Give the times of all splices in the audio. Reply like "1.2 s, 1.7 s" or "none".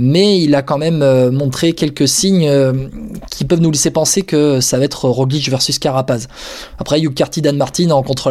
none